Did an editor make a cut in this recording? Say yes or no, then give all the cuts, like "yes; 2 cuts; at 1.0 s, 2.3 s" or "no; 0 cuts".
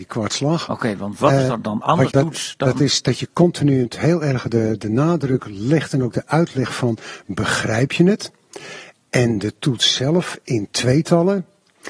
yes; 1 cut; at 2.1 s